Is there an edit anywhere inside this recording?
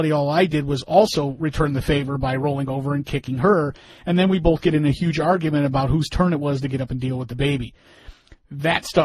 no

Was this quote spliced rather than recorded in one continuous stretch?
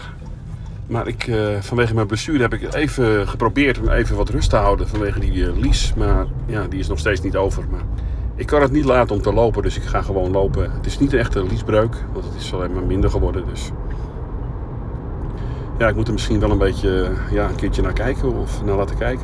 yes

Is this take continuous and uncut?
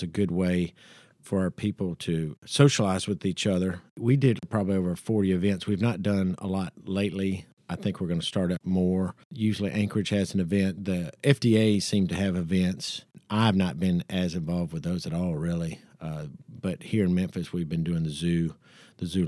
yes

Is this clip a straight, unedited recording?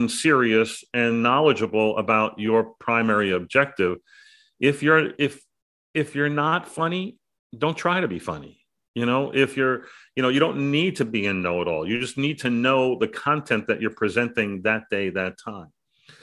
yes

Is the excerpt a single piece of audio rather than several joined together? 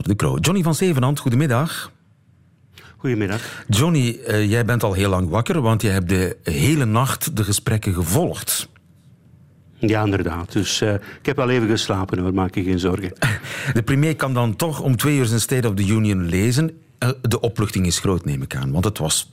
yes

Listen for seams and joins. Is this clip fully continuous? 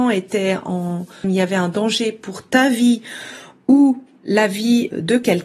no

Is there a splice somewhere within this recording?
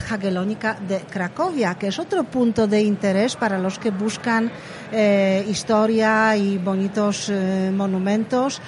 no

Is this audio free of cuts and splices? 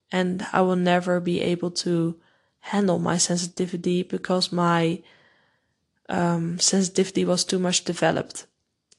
yes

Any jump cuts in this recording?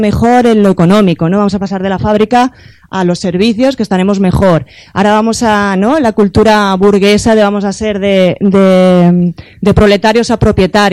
no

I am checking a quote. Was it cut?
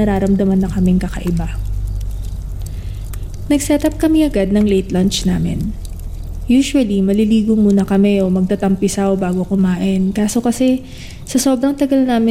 no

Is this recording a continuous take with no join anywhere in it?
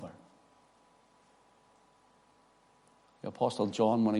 yes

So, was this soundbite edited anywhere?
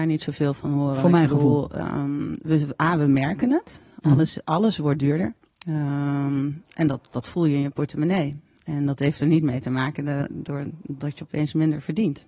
no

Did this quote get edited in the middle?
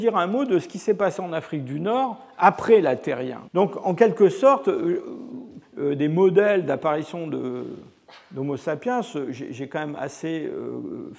yes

